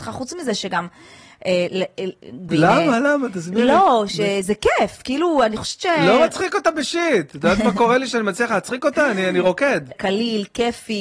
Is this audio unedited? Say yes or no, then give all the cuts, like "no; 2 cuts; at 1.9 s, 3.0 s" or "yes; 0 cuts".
no; 2 cuts; at 2.5 s, 9.9 s